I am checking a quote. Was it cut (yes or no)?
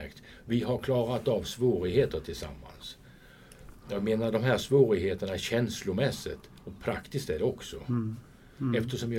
no